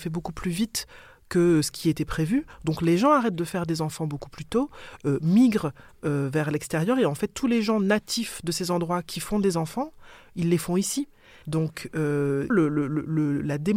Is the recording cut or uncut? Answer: cut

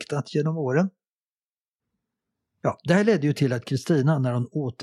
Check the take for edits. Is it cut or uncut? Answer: uncut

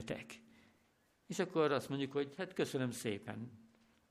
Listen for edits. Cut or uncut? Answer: uncut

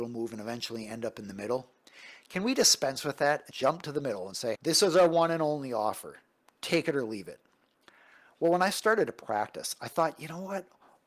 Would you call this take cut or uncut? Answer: cut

